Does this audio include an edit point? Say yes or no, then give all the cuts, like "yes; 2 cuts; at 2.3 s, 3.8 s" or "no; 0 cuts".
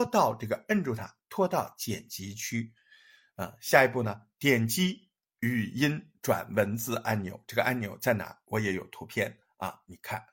no; 0 cuts